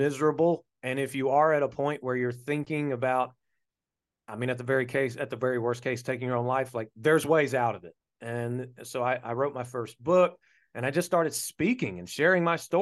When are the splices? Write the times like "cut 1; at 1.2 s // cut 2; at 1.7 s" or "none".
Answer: none